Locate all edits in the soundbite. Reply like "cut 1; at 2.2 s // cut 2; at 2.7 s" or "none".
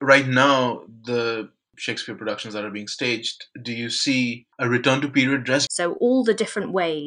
cut 1; at 4.5 s // cut 2; at 5.7 s